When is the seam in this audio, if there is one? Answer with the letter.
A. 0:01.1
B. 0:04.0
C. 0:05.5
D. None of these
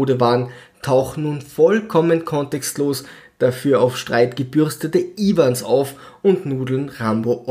D